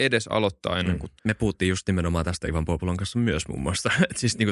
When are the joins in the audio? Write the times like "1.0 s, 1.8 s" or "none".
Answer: 1.2 s